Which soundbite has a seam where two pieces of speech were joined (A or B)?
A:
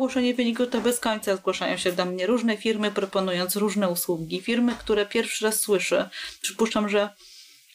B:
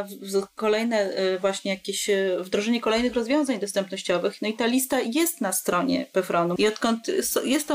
B